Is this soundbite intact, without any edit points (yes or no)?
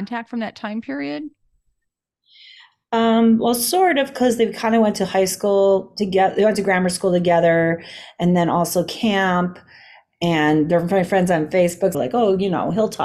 no